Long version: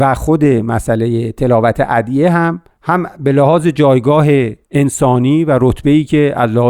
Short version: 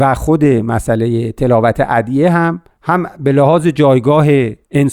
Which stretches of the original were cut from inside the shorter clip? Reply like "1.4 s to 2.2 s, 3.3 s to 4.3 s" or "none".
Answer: none